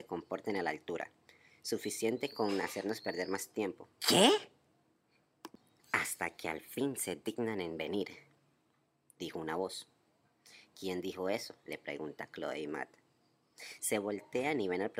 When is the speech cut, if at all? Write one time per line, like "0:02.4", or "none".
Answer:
0:04.0
0:05.8